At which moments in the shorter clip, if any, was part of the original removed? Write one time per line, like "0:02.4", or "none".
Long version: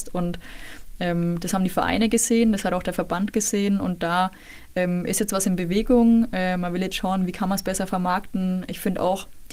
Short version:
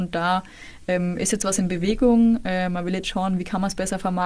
none